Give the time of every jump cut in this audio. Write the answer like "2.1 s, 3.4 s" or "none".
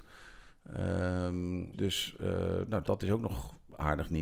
1.7 s, 2.8 s